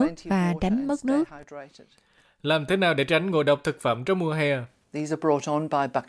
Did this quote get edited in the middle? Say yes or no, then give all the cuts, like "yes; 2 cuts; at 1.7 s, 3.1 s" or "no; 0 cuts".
yes; 1 cut; at 4.8 s